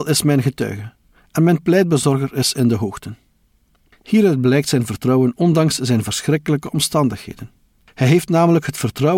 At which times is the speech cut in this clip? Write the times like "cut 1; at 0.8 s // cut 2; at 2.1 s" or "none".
none